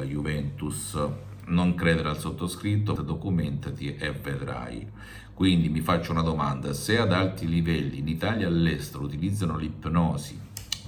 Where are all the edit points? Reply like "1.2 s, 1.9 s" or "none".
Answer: 3.0 s